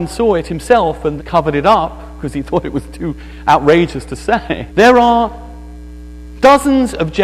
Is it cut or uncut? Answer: cut